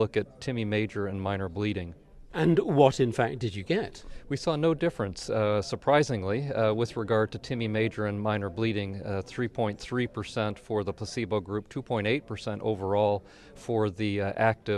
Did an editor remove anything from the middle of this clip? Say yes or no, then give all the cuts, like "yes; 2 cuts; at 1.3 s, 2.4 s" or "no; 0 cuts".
no; 0 cuts